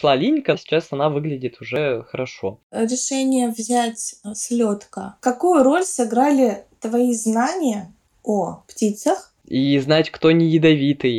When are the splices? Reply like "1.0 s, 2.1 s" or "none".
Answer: 9.4 s

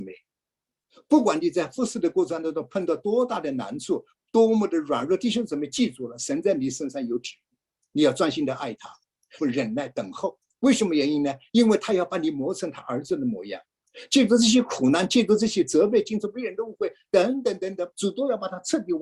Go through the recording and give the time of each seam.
9.4 s, 17.9 s

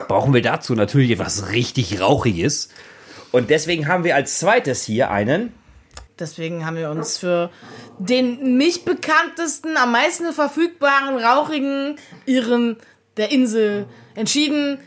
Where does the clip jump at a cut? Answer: 6.1 s

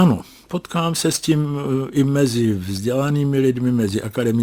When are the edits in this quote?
none

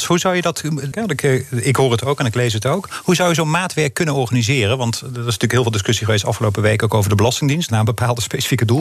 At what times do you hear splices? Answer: 0.9 s, 7.7 s

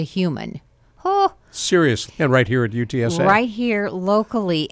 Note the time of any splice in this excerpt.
2.1 s

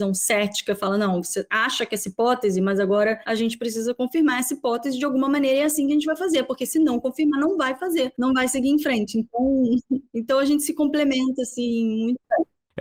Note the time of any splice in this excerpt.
none

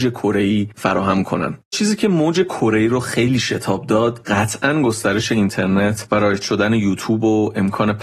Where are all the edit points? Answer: none

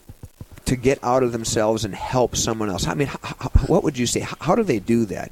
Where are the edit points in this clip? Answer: none

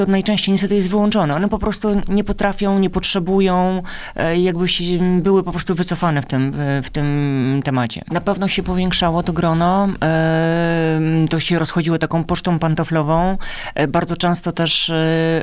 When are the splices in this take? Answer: 2.1 s, 8.1 s

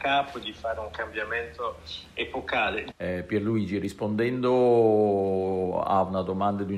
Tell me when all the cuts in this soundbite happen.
2.9 s

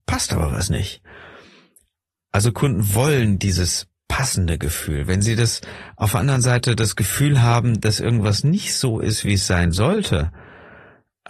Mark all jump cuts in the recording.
none

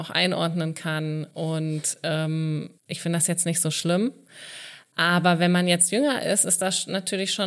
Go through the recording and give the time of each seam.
2.8 s

